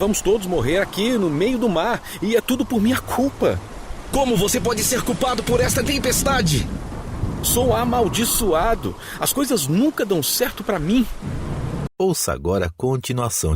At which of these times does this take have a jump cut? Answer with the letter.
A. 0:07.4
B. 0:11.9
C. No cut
B